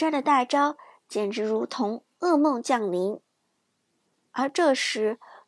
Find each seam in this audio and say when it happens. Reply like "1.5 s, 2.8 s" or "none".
none